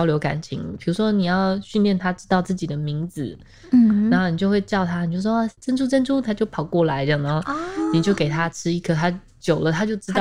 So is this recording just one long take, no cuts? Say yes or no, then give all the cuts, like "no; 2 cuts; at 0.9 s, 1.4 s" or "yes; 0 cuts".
yes; 0 cuts